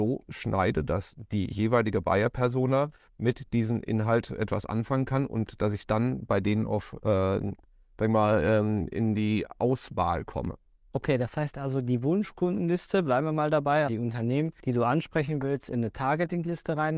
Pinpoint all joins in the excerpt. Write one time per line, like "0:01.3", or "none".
0:10.9
0:13.9